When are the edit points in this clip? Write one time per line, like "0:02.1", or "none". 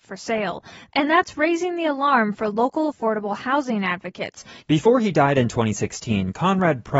0:04.6